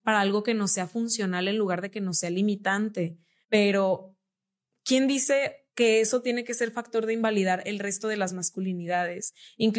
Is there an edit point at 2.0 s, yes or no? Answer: no